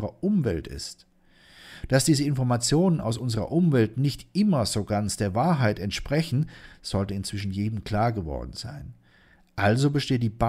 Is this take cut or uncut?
uncut